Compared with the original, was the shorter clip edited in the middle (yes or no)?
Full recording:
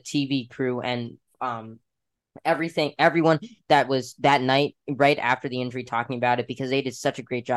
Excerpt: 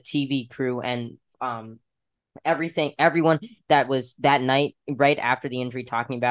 no